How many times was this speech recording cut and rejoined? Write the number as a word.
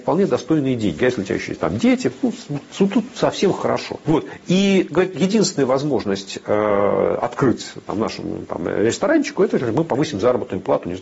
one